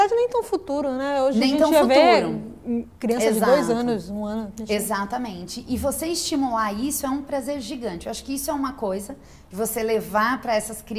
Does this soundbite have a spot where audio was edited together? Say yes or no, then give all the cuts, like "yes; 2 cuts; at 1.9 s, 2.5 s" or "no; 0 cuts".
no; 0 cuts